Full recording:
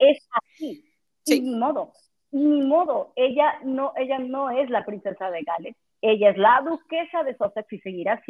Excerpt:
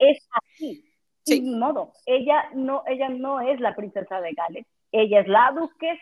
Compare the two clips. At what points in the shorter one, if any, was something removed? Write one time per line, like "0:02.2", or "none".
0:02.0